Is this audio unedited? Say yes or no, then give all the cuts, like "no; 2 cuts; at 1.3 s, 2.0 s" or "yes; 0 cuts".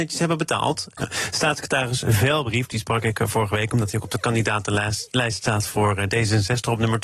no; 1 cut; at 1.0 s